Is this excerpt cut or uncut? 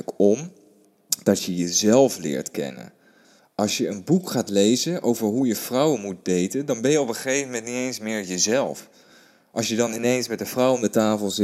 uncut